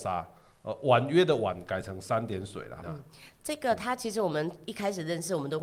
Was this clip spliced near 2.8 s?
yes; 1 cut; at 2.8 s

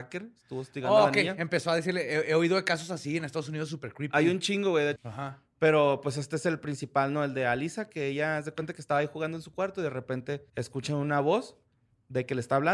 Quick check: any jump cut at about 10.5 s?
yes; 2 cuts; at 5.0 s, 10.5 s

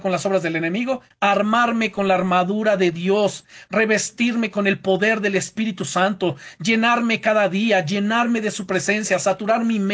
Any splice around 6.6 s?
no; 1 cut; at 1.1 s

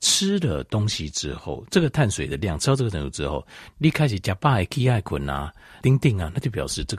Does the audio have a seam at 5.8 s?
yes; 1 cut; at 5.8 s

